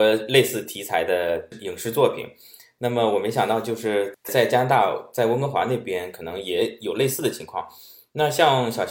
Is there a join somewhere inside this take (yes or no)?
no